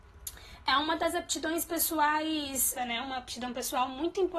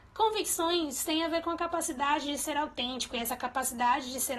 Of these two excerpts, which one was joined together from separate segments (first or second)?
first